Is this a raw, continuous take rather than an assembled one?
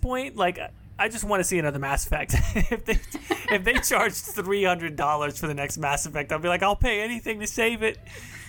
yes; 0 cuts

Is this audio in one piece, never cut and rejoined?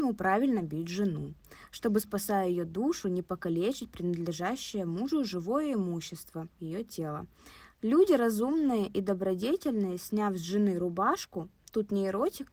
no; 1 cut; at 7.7 s

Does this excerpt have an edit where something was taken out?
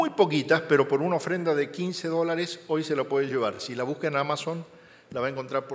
no; 0 cuts

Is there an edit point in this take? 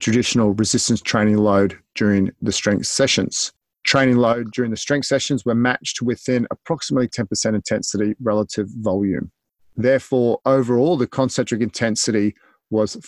no; 0 cuts

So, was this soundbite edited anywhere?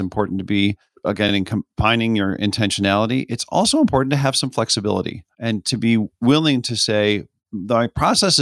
no; 0 cuts

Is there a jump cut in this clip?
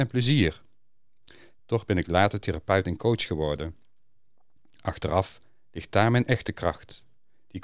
no; 0 cuts

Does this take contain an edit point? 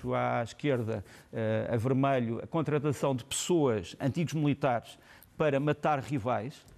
no; 0 cuts

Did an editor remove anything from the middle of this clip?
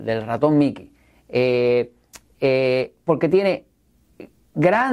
no; 0 cuts

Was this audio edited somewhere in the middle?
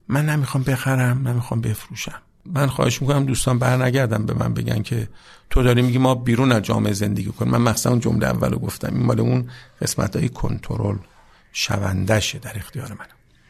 no; 0 cuts

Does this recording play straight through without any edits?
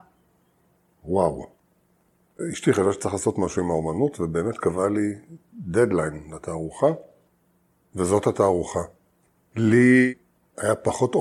yes; 0 cuts

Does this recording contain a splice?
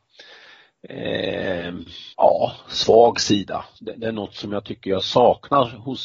yes; 2 cuts; at 2.1 s, 3.8 s

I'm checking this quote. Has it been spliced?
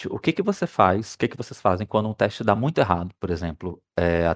no; 0 cuts

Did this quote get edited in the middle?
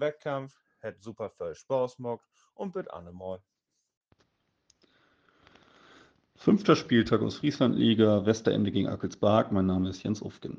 no; 0 cuts

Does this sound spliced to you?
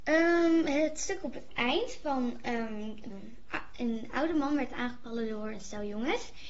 yes; 1 cut; at 3.1 s

